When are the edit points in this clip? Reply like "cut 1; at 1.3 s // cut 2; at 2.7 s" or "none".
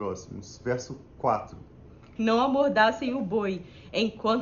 cut 1; at 2.2 s